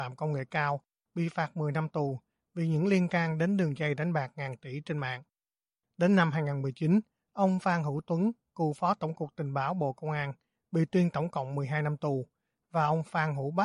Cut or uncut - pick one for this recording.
uncut